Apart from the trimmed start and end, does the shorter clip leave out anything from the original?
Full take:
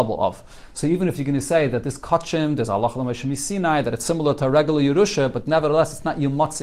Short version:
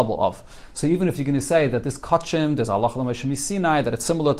no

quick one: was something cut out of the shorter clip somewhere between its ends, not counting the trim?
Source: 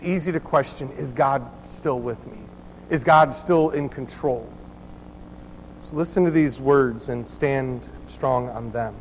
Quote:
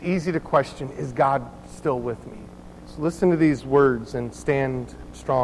yes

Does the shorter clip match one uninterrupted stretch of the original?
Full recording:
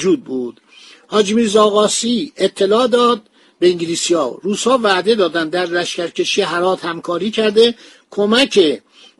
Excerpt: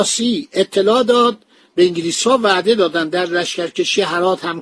no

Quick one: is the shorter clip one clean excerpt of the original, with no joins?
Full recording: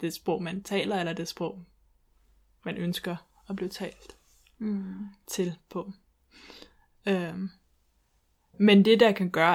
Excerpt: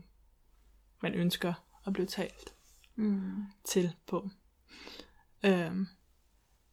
yes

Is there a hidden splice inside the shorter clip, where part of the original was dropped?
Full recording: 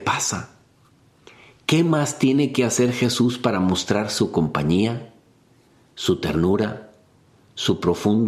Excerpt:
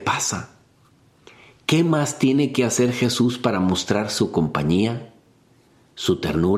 no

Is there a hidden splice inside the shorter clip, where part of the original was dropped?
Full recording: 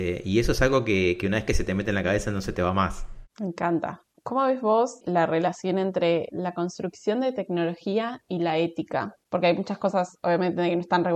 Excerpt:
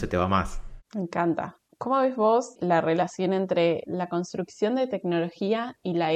no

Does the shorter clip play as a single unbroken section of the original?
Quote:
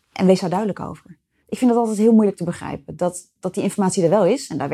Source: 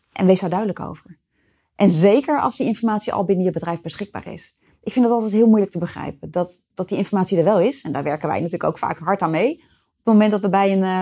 no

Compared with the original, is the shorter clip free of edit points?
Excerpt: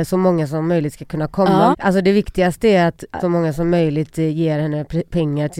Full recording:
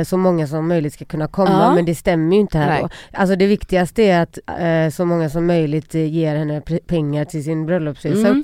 no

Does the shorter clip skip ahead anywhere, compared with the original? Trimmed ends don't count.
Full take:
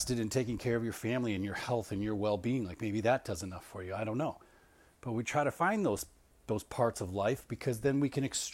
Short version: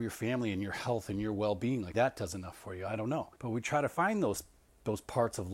yes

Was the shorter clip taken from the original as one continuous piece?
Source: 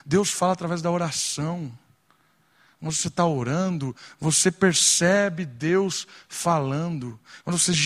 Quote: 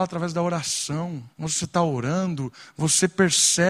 no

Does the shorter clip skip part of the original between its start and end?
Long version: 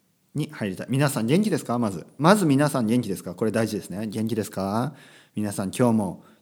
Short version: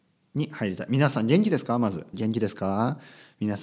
yes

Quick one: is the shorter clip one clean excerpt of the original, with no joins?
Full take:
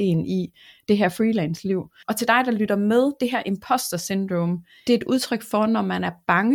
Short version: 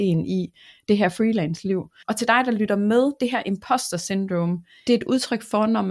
yes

